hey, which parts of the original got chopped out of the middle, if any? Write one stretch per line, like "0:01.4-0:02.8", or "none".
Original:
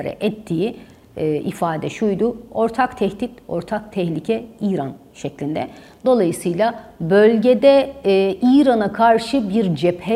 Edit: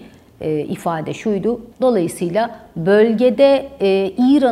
0:02.5-0:06.0